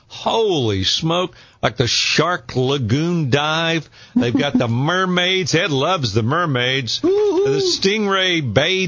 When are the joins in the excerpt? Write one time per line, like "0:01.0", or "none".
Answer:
none

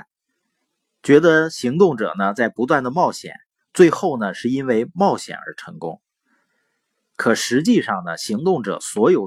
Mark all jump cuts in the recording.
none

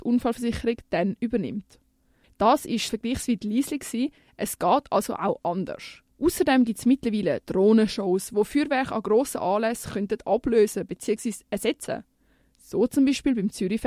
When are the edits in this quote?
0:02.2
0:06.1

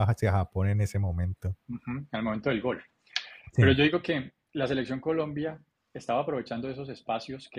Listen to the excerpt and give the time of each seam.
0:01.6

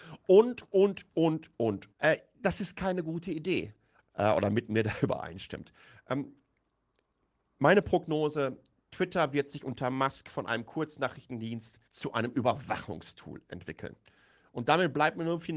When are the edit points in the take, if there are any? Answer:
0:01.9
0:04.0
0:11.9

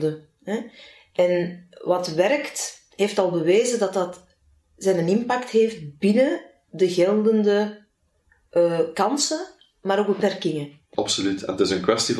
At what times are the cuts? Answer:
0:10.9

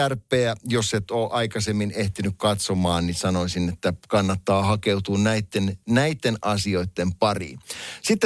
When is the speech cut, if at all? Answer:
none

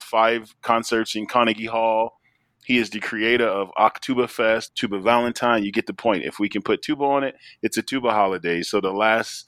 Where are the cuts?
0:04.7

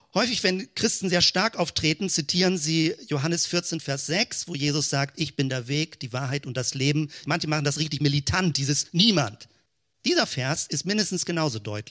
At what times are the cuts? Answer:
0:07.2
0:10.0

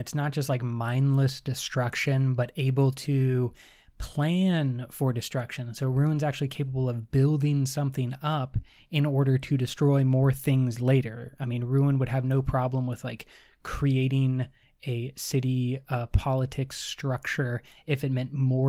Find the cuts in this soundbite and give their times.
none

